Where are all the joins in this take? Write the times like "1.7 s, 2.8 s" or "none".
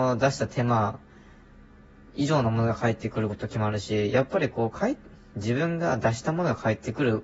none